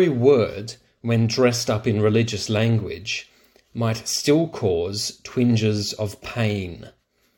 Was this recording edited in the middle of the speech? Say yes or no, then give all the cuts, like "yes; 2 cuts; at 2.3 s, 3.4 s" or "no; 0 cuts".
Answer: no; 0 cuts